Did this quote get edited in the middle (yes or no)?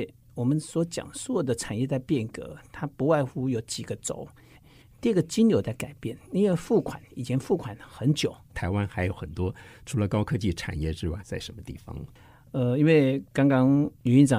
yes